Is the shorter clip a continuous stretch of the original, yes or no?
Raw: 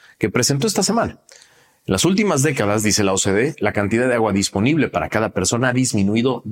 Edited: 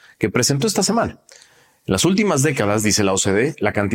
yes